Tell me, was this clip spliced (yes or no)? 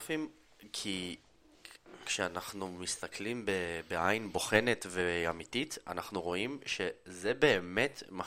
no